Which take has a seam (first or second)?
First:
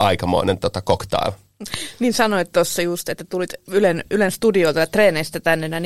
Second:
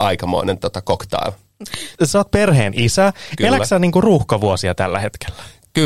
second